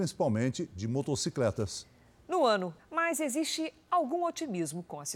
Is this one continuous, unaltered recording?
no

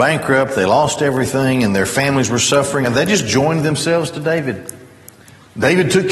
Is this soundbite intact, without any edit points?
no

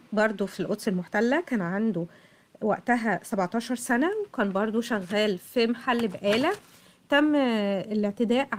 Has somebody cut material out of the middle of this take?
no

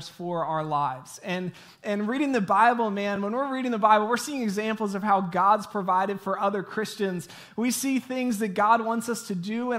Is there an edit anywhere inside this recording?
no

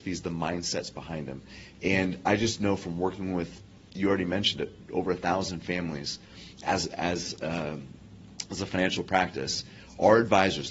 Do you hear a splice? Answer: no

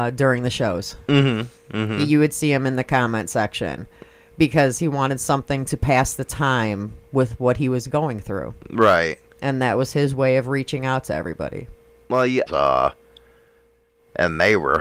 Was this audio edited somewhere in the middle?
yes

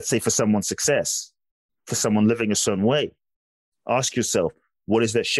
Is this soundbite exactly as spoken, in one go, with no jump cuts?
yes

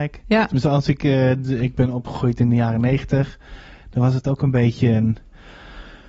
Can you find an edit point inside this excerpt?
no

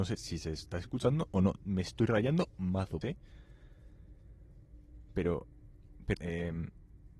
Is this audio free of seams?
no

